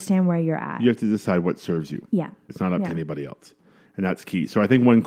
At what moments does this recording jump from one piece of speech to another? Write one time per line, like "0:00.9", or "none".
0:02.5

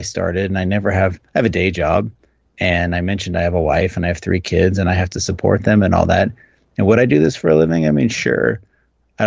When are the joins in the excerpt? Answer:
none

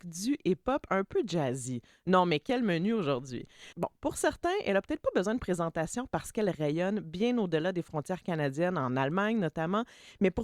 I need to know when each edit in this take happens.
0:03.7

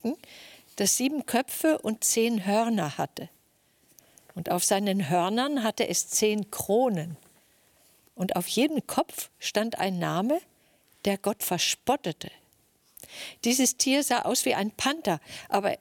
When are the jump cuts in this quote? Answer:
none

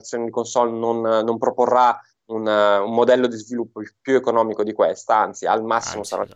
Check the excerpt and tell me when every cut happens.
none

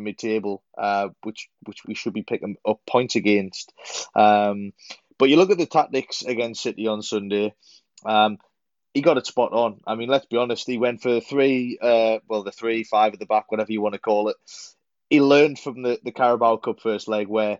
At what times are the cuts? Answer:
0:01.8

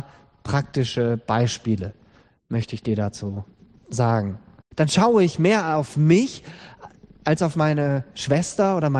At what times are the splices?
0:04.6

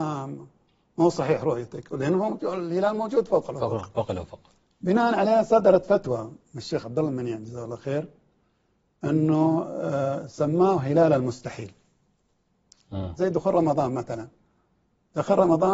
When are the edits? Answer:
0:13.2

